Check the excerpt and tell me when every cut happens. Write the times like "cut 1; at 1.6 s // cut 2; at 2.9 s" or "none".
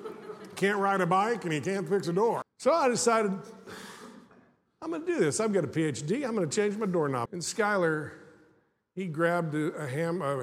cut 1; at 2.4 s // cut 2; at 7.3 s